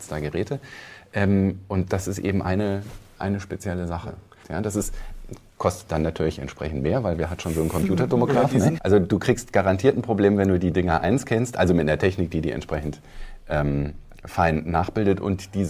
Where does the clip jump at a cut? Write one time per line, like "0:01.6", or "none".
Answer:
0:04.4
0:08.8